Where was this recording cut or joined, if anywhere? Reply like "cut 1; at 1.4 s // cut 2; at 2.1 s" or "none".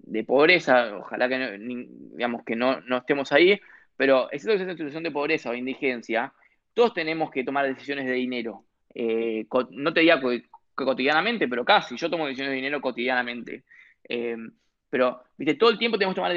none